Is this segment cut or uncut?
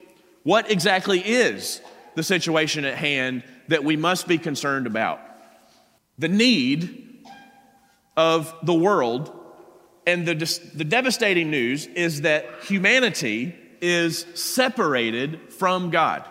cut